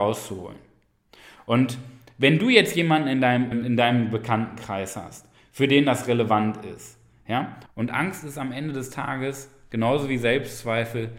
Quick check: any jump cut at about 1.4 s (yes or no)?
no